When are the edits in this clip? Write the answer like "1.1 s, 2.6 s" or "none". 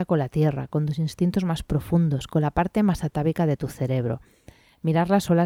none